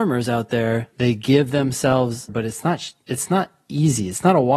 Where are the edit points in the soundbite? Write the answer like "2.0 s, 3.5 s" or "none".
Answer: 0.9 s, 2.3 s

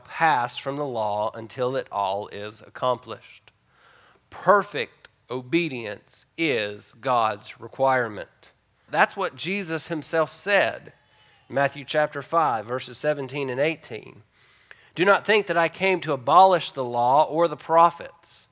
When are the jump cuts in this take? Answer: 8.9 s

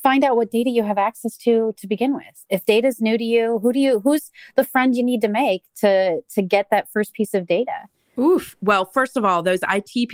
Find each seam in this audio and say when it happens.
none

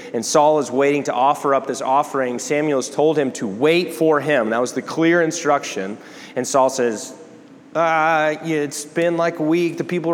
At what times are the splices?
none

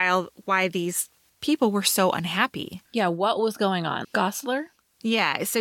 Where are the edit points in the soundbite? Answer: 4.0 s

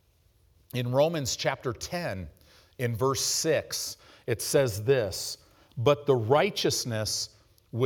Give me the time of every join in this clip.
none

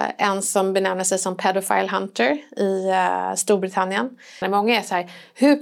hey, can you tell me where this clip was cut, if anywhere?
4.4 s

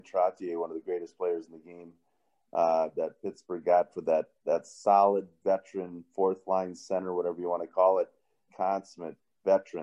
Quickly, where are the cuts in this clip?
8.5 s

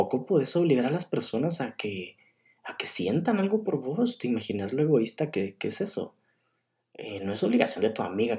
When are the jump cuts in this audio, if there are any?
none

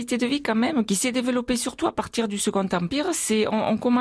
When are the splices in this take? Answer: none

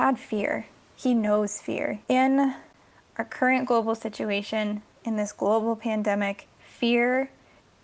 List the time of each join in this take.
2.0 s, 6.5 s

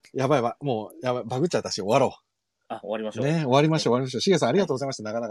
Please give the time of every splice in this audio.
none

